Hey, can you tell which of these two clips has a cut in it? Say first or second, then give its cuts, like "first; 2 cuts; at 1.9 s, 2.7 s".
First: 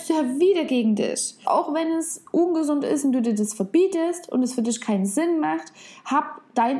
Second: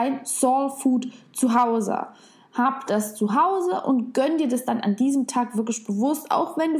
first; 1 cut; at 1.4 s